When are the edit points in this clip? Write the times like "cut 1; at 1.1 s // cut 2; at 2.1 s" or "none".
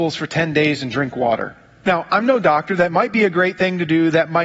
cut 1; at 1.8 s